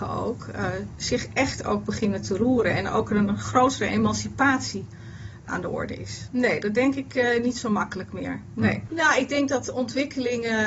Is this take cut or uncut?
cut